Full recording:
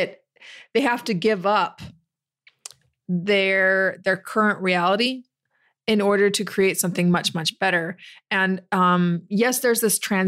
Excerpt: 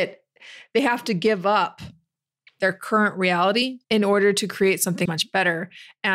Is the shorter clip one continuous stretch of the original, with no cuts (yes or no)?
no